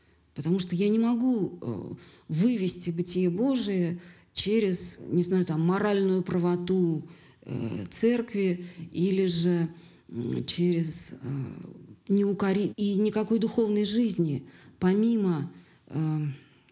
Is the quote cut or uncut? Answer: cut